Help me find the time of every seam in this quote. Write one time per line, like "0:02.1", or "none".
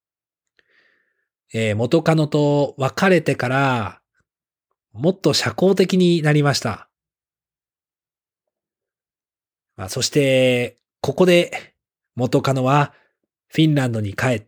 0:09.6